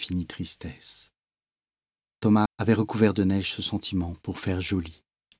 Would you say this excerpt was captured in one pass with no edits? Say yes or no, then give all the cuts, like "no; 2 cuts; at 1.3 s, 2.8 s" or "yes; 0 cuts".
no; 1 cut; at 2.5 s